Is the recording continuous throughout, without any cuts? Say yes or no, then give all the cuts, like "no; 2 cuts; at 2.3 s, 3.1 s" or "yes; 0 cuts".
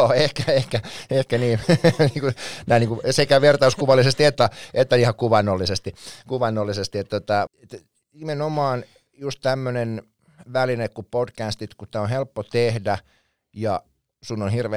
no; 1 cut; at 7.5 s